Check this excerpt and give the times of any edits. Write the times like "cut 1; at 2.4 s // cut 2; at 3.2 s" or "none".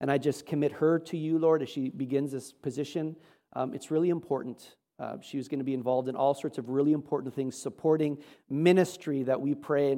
none